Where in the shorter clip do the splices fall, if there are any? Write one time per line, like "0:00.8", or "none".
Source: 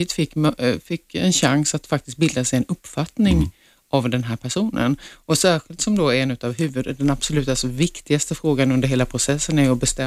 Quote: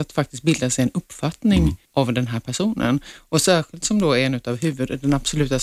0:01.9